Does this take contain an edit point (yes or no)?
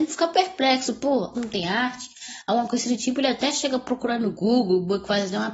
yes